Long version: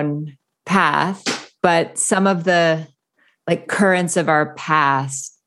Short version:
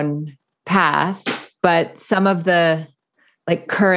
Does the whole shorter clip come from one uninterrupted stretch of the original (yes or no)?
yes